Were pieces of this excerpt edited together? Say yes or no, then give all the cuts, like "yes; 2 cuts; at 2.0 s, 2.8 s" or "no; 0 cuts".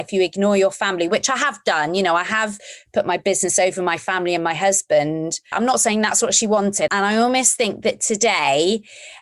yes; 2 cuts; at 5.5 s, 6.9 s